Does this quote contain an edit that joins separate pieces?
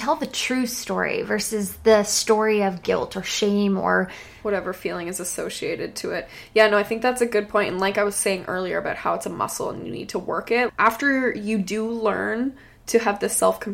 yes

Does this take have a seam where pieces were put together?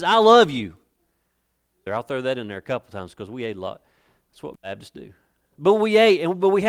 yes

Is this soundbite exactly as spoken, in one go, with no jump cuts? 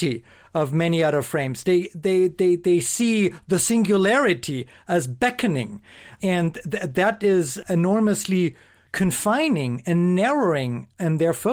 yes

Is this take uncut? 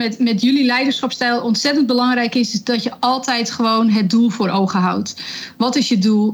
yes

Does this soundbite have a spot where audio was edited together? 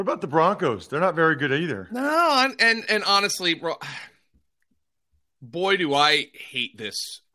no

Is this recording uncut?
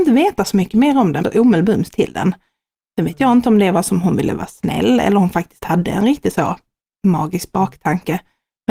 no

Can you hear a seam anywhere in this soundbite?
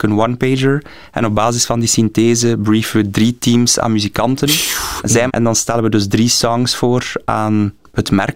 yes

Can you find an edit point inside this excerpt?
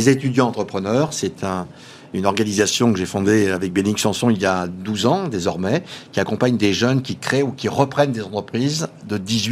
no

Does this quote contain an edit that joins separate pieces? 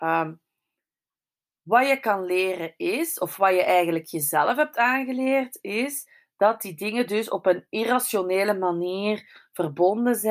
no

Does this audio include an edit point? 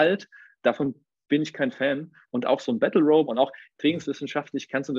yes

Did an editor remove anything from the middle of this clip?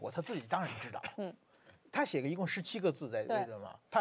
no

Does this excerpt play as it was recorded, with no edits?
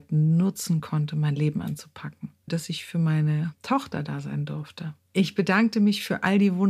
no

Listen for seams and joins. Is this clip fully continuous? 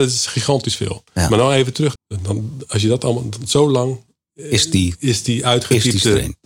no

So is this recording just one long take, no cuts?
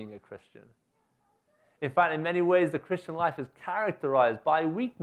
yes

